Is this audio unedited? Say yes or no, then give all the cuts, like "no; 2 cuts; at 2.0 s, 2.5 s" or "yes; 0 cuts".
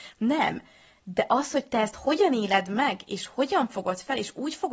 yes; 0 cuts